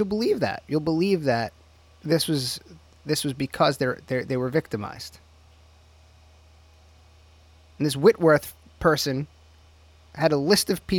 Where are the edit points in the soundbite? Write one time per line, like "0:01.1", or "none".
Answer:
none